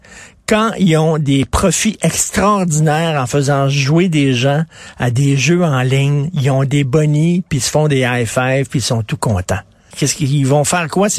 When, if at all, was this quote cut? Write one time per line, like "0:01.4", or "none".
0:09.9